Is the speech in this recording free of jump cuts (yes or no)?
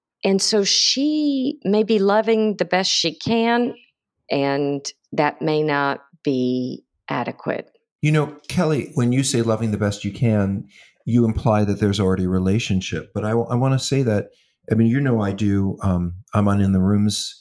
yes